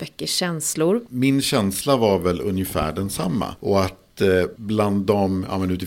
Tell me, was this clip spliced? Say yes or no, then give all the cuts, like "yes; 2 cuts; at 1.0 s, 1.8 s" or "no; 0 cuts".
yes; 1 cut; at 1.1 s